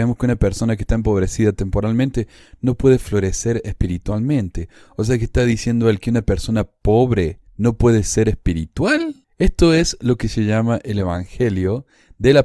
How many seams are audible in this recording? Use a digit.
2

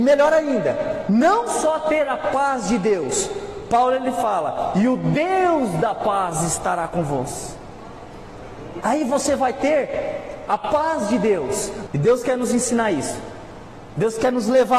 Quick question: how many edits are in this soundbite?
2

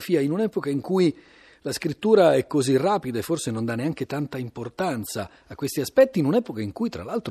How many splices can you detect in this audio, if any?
0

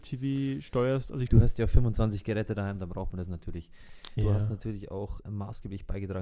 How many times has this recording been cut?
3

